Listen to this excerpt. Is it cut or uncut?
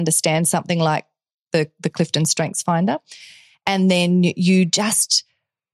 uncut